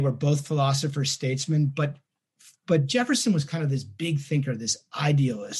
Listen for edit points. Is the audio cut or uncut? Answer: uncut